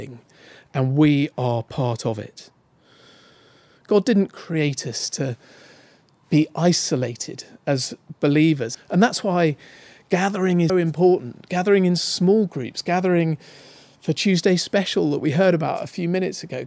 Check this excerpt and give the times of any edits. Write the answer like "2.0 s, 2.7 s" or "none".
8.7 s, 10.7 s